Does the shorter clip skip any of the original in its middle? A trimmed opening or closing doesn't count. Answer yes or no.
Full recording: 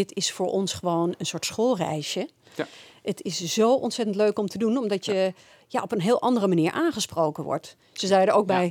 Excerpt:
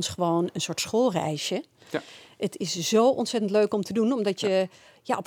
no